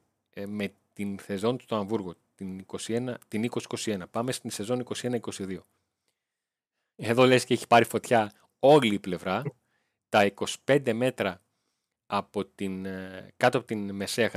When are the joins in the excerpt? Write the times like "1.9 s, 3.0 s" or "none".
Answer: none